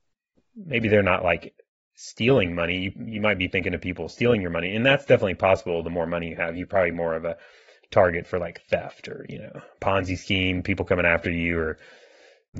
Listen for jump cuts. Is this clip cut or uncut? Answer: uncut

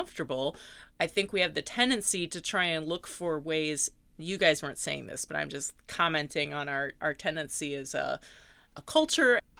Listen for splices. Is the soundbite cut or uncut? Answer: uncut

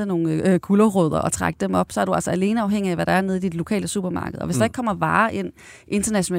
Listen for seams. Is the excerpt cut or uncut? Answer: uncut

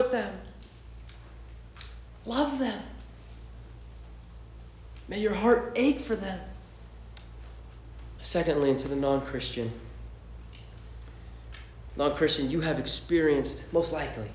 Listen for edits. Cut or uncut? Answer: cut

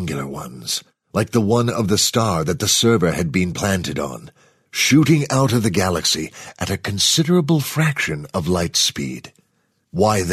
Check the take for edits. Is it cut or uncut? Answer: uncut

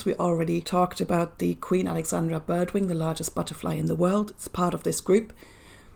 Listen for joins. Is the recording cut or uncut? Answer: uncut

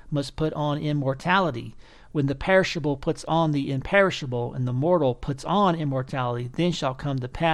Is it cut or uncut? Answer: uncut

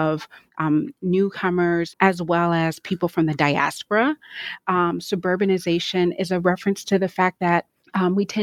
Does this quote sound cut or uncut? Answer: cut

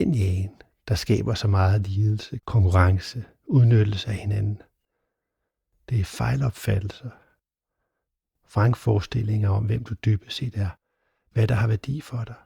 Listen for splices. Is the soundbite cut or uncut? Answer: cut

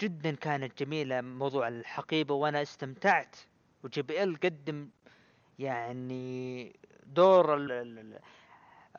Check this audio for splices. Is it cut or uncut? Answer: cut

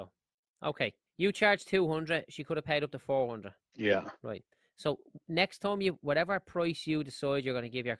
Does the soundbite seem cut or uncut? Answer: cut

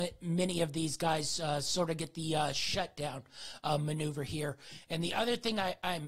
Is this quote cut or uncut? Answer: uncut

